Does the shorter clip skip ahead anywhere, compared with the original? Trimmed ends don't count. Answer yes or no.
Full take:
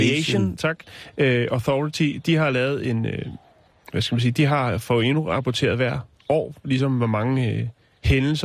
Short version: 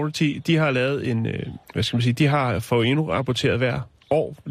yes